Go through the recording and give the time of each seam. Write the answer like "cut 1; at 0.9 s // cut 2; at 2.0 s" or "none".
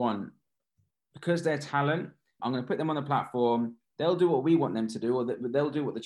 cut 1; at 0.9 s // cut 2; at 2.4 s